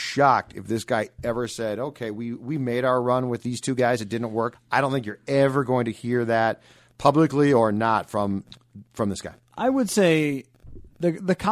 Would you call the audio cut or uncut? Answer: cut